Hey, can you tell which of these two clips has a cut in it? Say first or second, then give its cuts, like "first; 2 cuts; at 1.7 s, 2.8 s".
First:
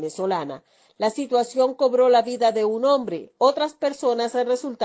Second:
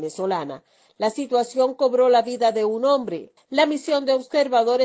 second; 1 cut; at 3.4 s